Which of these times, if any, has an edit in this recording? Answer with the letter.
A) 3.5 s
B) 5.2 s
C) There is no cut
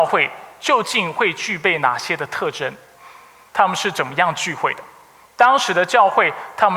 A